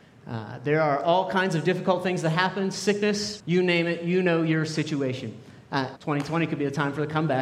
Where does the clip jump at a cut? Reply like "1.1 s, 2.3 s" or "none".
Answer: 3.4 s, 6.0 s